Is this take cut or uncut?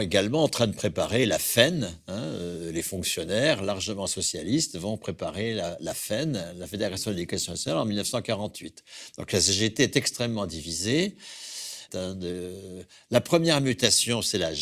cut